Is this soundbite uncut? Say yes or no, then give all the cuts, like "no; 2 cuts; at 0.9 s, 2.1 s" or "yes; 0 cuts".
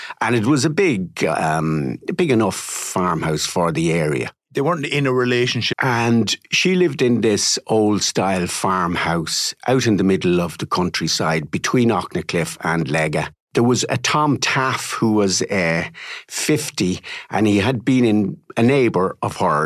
no; 1 cut; at 5.7 s